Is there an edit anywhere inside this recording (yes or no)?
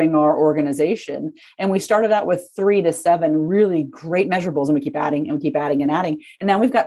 no